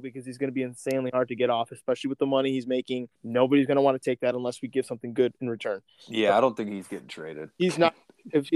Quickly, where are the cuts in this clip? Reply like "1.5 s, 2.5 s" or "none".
3.2 s

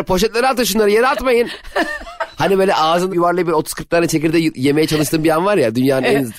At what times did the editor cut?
3.1 s

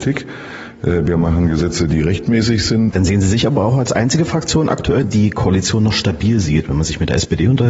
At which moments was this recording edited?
2.9 s, 5.0 s

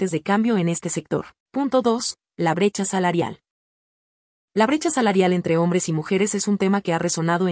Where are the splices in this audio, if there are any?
1.4 s

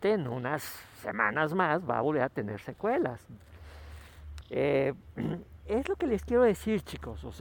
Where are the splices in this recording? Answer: 4.4 s, 5.6 s

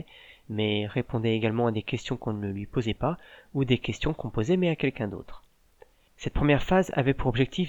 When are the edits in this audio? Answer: 6.1 s

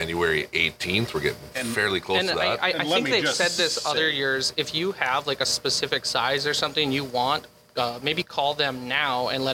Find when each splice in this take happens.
none

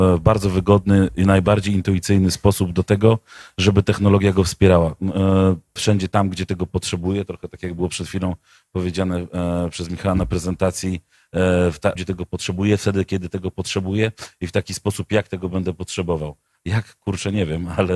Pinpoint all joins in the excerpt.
5.8 s, 12.0 s

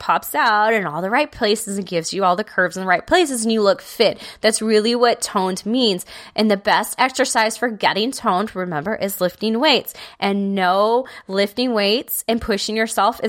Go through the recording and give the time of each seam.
none

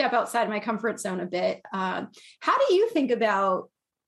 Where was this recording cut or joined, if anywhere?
none

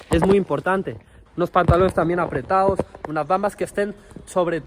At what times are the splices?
1.3 s

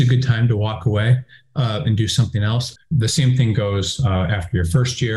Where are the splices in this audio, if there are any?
2.8 s

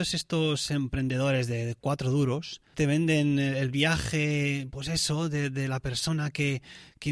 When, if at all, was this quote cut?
2.7 s

